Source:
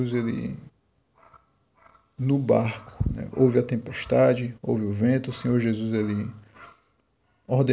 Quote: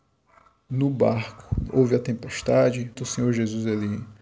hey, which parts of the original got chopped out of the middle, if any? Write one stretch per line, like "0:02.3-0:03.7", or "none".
0:03.2-0:03.3
0:04.6-0:05.2